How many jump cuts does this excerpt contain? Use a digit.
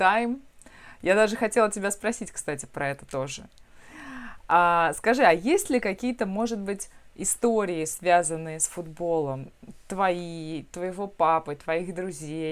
0